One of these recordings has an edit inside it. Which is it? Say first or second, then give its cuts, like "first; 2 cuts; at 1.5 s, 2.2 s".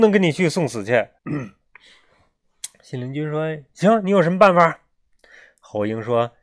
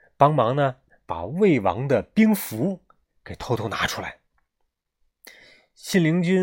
first; 1 cut; at 1.2 s